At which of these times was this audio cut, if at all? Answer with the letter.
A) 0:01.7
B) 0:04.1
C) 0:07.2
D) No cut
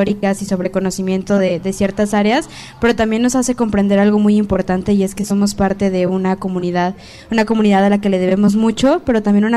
D